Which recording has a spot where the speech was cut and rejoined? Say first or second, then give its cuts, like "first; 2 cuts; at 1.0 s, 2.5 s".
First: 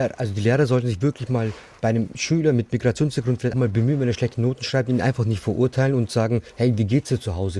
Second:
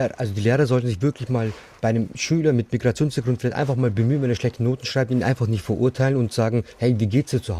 first; 1 cut; at 3.5 s